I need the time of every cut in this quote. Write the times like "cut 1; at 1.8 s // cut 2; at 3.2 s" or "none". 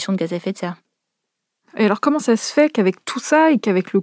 none